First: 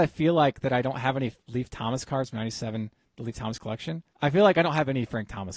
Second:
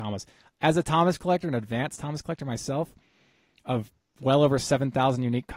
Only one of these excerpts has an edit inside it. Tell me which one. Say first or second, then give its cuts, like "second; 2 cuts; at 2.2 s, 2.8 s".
first; 1 cut; at 4.1 s